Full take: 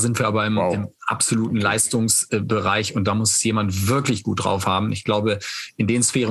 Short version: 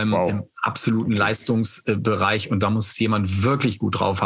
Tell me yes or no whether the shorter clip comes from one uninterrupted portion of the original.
yes